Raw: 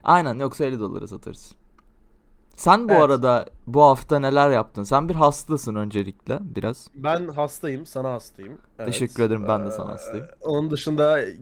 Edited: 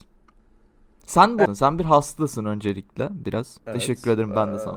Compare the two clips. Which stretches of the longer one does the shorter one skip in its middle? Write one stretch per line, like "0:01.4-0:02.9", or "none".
0:03.0-0:04.8
0:06.9-0:08.7